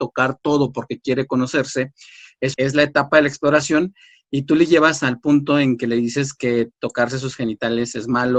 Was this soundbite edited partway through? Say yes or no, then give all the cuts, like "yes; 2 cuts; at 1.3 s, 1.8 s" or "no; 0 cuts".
yes; 1 cut; at 2.5 s